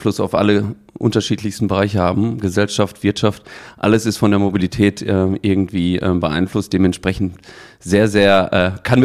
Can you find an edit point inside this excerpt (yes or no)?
no